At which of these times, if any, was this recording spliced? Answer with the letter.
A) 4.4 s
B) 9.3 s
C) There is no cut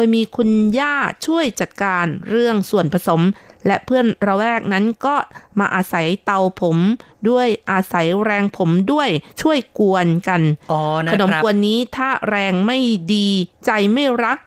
B